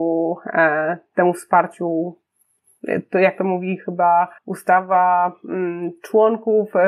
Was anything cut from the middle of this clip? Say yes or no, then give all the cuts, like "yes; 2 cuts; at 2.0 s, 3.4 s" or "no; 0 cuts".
yes; 1 cut; at 4.4 s